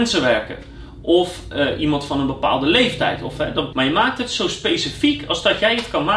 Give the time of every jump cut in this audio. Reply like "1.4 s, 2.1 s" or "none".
3.7 s